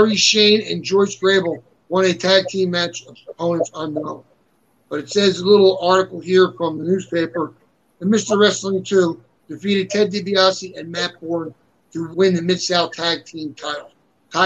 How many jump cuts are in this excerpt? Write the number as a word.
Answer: three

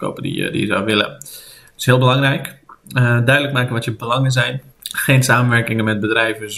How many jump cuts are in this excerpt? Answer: one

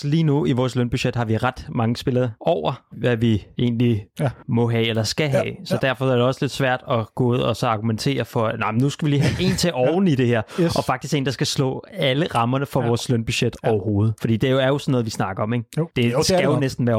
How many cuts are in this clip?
one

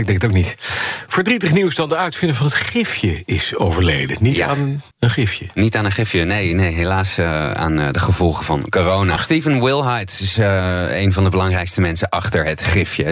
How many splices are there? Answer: two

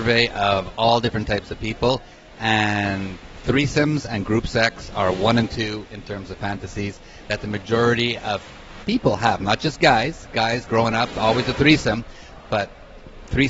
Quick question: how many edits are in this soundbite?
zero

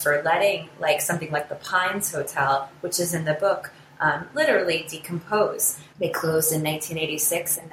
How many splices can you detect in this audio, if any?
one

